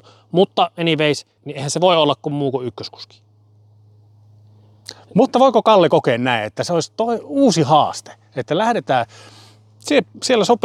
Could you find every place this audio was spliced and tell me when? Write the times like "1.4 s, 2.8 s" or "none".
1.4 s